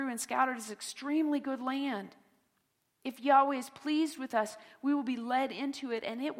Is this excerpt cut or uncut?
uncut